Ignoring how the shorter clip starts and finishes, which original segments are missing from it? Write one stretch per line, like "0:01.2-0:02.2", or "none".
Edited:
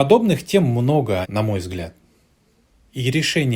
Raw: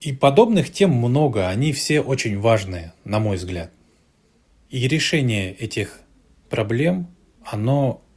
0:01.5-0:03.0